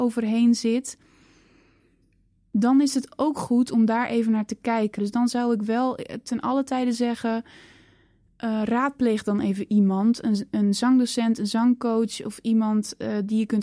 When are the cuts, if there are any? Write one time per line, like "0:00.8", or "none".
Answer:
0:05.0